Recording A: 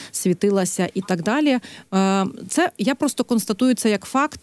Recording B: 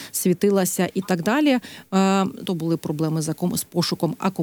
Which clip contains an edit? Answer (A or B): B